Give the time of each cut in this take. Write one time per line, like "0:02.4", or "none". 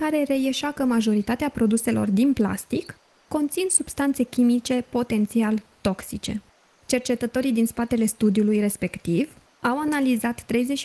none